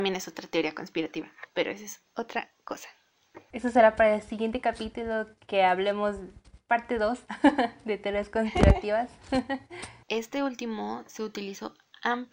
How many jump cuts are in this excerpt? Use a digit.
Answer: 1